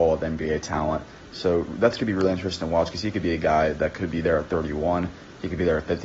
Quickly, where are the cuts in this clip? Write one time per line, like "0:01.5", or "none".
none